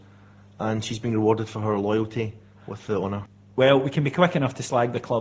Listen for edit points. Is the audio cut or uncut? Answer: uncut